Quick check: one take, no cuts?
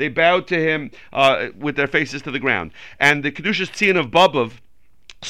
yes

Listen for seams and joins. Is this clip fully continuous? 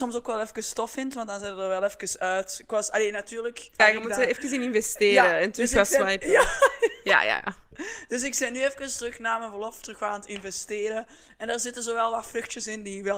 no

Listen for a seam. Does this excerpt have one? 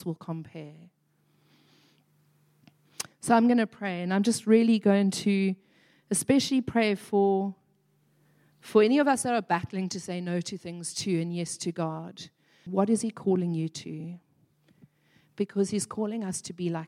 yes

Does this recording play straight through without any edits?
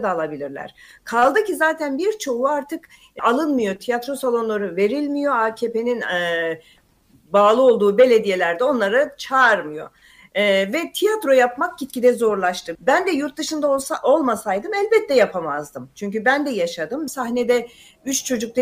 no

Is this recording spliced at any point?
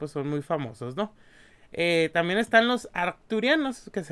no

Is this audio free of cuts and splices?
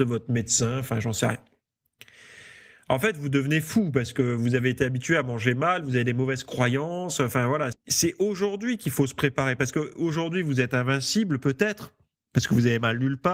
no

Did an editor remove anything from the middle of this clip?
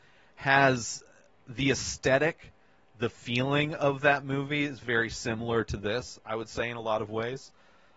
no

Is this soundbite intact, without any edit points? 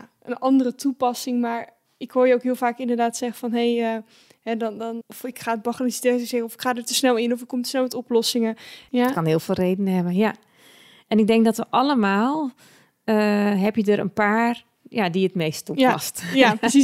no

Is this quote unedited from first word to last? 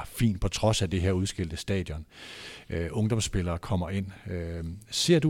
yes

